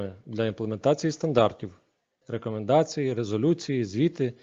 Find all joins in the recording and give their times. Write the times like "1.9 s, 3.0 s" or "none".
2.2 s